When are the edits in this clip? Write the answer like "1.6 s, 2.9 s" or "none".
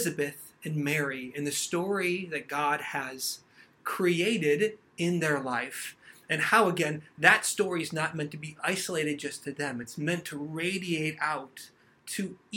none